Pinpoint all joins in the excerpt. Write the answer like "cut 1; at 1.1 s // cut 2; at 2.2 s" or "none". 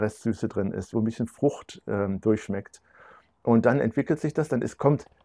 cut 1; at 0.9 s